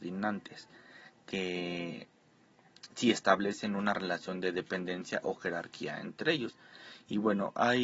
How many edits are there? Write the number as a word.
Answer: zero